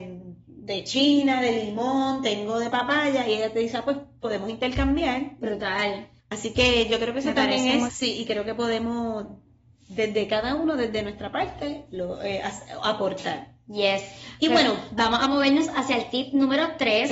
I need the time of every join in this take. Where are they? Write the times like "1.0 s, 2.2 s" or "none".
6.2 s, 7.9 s

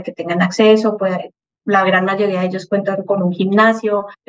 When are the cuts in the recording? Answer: none

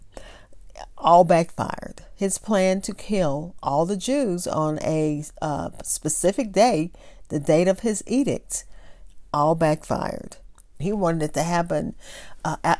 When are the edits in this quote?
10.8 s

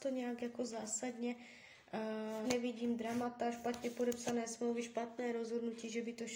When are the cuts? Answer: 2.4 s

